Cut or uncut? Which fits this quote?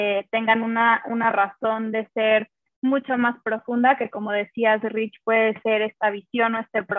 uncut